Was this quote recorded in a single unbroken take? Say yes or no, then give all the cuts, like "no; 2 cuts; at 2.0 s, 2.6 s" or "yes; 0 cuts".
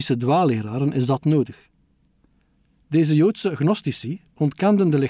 yes; 0 cuts